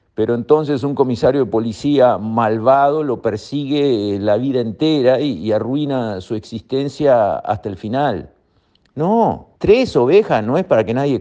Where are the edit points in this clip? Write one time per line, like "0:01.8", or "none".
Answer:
0:09.6